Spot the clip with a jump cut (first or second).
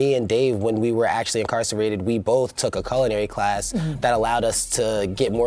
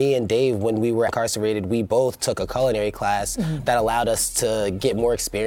second